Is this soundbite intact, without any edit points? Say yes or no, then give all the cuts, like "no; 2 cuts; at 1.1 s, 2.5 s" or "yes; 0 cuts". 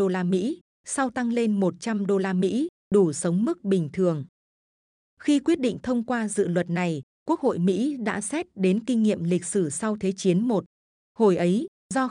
yes; 0 cuts